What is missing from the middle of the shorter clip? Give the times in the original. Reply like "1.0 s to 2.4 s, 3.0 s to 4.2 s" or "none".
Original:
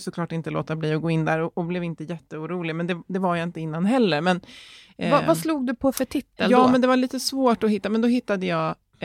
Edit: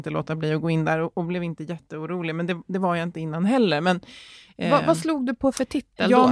none